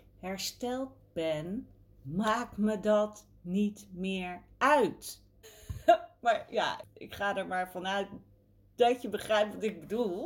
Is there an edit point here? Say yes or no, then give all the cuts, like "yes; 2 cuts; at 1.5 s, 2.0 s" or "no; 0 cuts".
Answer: yes; 2 cuts; at 5.4 s, 6.8 s